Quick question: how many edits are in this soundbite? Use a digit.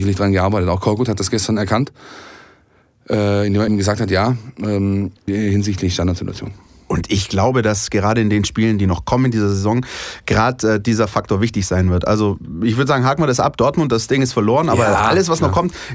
2